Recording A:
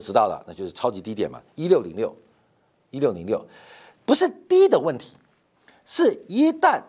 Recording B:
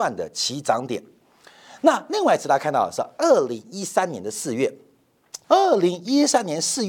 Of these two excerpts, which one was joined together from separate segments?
B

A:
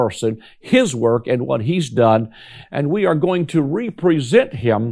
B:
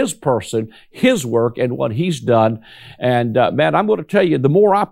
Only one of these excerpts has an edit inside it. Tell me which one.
A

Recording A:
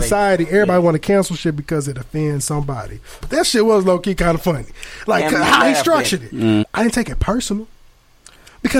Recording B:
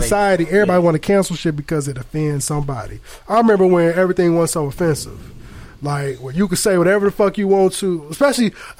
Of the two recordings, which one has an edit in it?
A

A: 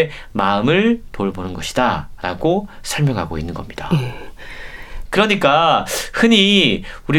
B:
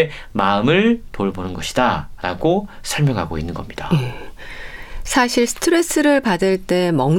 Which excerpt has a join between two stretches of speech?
A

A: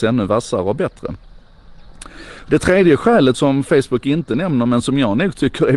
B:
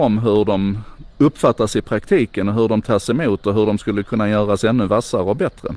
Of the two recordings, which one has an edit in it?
A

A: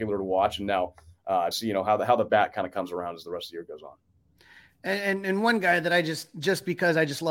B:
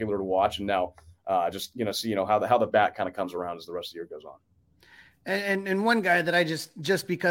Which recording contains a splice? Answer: A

